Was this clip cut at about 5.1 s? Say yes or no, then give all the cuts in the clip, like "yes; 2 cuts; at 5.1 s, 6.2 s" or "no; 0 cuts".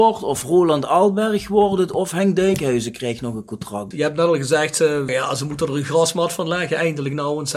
yes; 2 cuts; at 3.9 s, 5.1 s